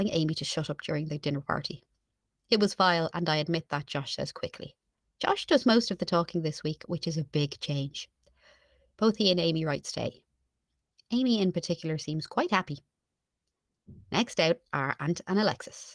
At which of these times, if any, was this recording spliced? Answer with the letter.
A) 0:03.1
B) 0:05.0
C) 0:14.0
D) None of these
B